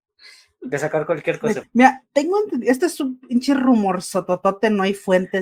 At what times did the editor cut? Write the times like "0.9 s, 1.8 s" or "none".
1.6 s